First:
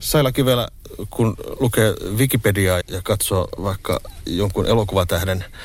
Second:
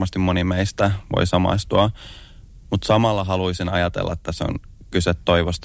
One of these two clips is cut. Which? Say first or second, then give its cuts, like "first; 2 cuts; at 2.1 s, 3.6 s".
first; 1 cut; at 2.8 s